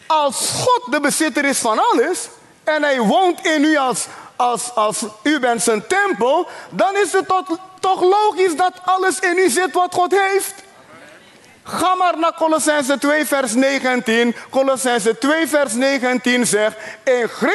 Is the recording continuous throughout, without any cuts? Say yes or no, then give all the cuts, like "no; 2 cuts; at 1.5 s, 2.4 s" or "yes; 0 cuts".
yes; 0 cuts